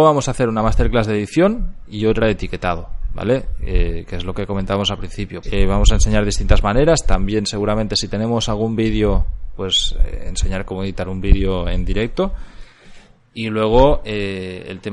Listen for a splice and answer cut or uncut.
cut